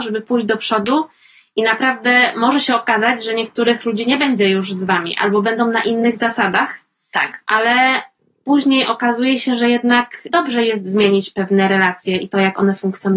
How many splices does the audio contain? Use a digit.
0